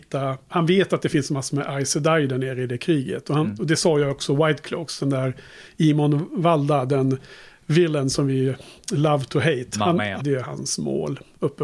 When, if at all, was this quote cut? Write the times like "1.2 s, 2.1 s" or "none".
10.2 s